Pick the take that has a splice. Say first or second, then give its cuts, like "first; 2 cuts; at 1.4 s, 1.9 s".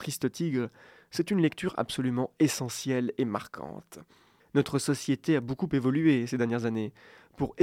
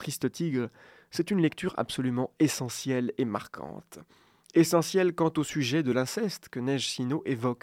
first; 1 cut; at 4.4 s